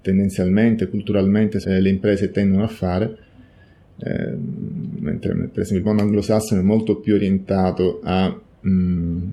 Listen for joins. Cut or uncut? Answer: cut